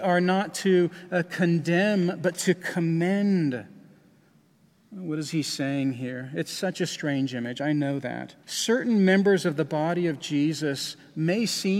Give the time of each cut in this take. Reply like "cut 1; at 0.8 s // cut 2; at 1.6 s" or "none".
cut 1; at 8.4 s